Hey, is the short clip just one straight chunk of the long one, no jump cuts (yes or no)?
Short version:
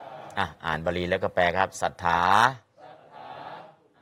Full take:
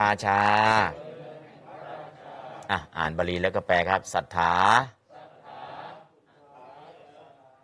yes